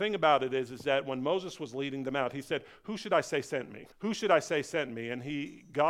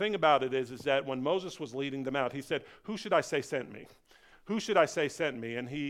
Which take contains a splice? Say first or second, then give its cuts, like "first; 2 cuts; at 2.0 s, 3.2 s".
first; 1 cut; at 3.9 s